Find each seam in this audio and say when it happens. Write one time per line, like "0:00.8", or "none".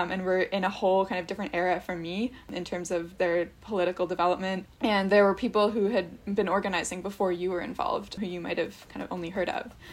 0:03.2